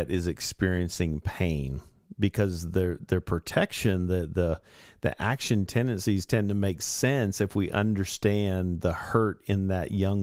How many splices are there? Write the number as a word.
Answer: zero